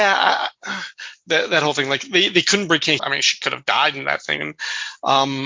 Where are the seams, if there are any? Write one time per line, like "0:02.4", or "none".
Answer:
0:01.3
0:03.0